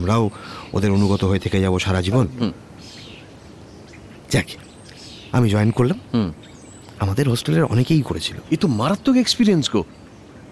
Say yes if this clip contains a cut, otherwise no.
yes